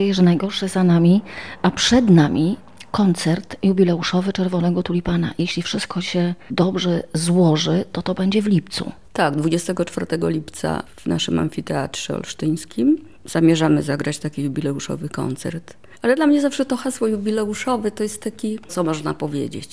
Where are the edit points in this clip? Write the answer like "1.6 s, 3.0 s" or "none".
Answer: 18.7 s